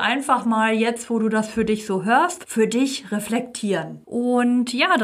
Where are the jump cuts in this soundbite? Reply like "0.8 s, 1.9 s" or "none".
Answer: 4.0 s

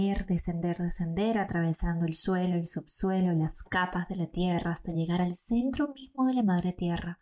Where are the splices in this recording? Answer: none

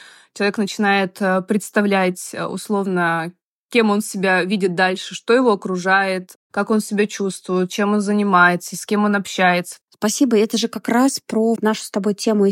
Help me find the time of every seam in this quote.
9.8 s, 11.6 s

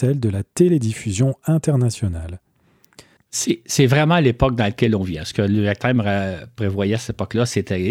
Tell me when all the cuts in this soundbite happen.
3.2 s

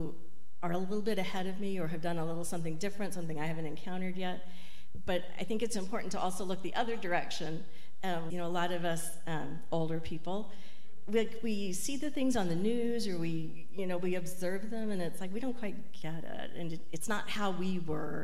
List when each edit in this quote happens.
8.3 s

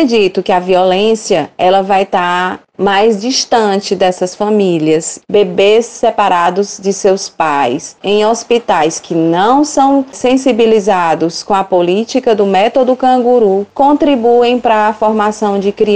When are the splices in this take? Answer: 5.2 s, 8.0 s

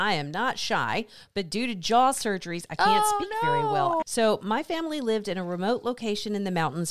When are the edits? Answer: 4.0 s

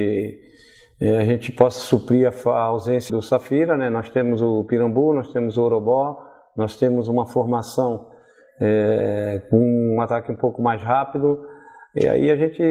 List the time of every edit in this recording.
3.1 s

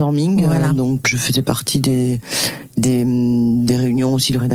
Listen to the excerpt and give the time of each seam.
1.0 s

